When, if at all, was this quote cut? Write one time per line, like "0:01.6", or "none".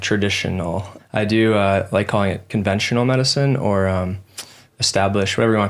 0:01.0